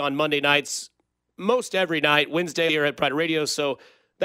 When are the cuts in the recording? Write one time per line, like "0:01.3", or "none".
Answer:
0:02.7